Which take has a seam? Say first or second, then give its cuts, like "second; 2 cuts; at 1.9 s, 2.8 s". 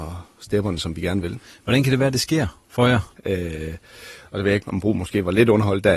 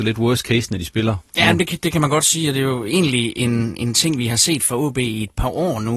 first; 2 cuts; at 3.2 s, 4.6 s